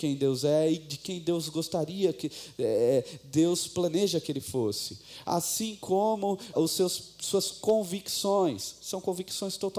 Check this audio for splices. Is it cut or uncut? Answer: cut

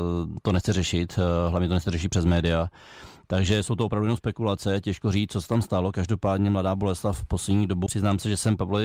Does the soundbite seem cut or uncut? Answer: cut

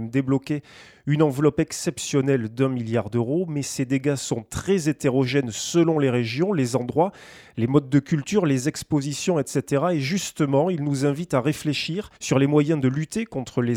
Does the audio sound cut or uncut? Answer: cut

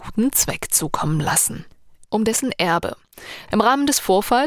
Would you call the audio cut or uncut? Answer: cut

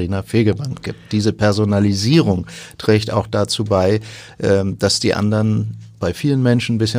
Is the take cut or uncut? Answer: uncut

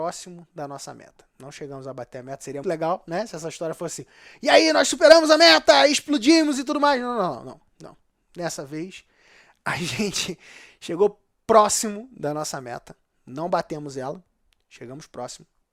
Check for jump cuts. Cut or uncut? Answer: cut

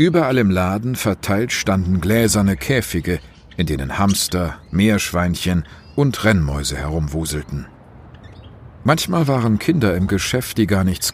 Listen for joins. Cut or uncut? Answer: uncut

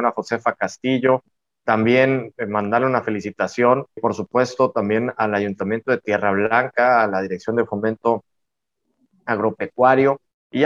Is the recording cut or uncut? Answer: cut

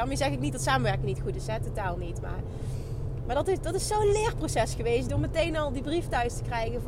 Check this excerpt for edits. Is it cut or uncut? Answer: uncut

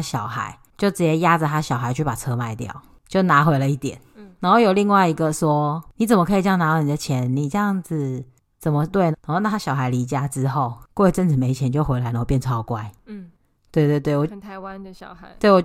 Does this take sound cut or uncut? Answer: cut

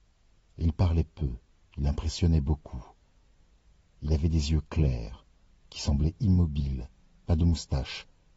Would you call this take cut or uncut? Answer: cut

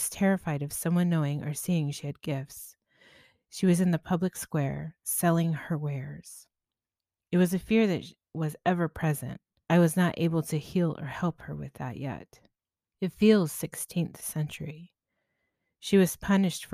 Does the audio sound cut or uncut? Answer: cut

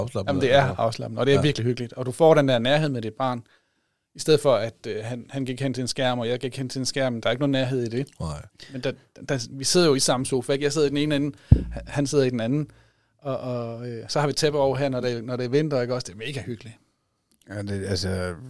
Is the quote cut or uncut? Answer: uncut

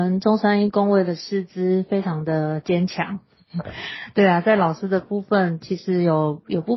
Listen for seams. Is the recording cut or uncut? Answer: uncut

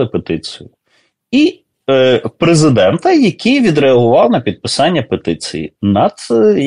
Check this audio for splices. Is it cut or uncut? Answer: cut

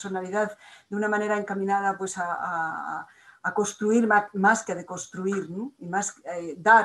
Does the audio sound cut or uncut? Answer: uncut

